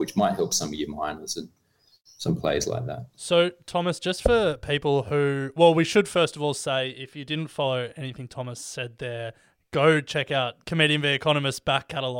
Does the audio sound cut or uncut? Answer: uncut